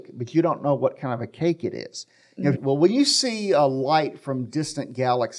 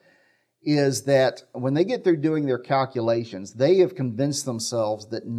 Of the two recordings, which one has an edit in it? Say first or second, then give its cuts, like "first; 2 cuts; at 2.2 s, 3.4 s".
first; 1 cut; at 2.5 s